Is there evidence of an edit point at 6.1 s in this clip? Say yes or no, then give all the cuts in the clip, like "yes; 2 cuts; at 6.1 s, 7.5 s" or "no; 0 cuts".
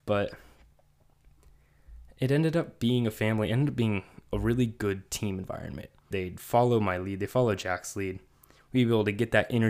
yes; 1 cut; at 6.1 s